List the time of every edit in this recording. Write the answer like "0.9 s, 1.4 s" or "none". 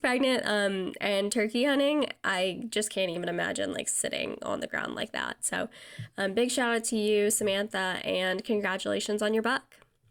none